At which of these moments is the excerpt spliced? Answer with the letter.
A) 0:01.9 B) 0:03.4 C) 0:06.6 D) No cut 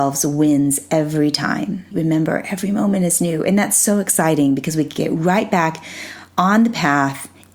A